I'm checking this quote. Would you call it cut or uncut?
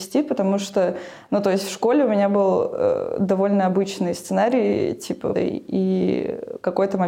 cut